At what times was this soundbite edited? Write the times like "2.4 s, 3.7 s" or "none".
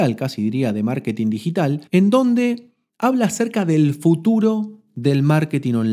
1.9 s